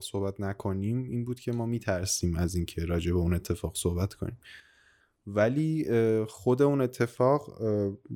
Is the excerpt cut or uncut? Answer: uncut